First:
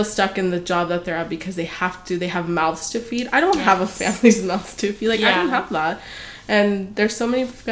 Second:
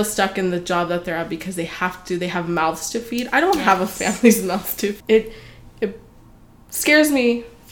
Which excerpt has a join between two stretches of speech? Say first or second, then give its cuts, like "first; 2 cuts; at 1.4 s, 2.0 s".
second; 1 cut; at 5.0 s